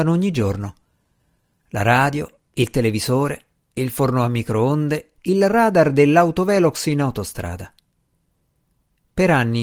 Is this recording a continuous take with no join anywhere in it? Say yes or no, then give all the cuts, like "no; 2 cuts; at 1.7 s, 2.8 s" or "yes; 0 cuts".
no; 1 cut; at 5.2 s